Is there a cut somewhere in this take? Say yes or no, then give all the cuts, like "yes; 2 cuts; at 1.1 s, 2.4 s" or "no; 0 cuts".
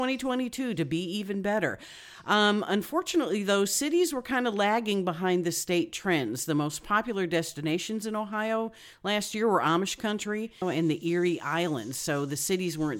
yes; 1 cut; at 10.6 s